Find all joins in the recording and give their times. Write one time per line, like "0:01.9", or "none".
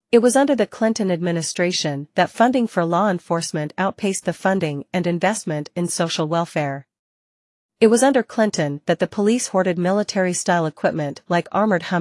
none